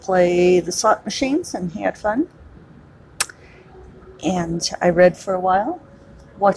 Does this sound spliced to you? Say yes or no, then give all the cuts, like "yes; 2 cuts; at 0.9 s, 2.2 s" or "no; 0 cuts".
no; 0 cuts